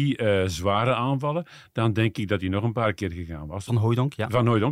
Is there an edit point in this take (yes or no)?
yes